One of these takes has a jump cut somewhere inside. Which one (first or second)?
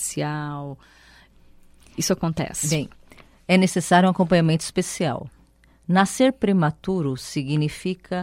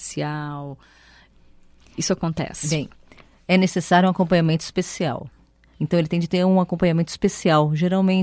second